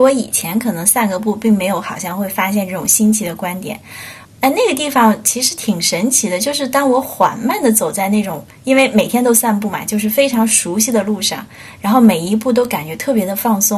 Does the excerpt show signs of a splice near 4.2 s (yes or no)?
yes